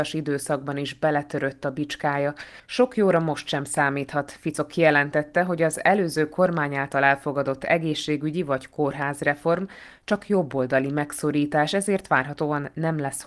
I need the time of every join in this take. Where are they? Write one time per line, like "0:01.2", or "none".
none